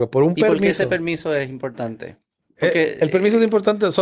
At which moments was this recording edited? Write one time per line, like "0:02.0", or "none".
none